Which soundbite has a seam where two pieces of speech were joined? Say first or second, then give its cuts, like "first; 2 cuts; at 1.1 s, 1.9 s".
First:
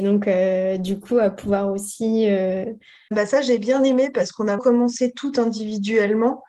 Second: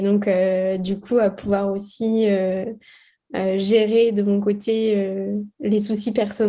first; 2 cuts; at 3.1 s, 4.6 s